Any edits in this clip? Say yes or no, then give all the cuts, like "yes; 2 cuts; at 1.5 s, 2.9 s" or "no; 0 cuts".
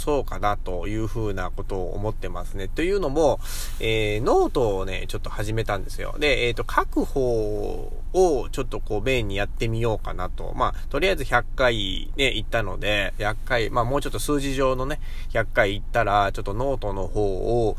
no; 0 cuts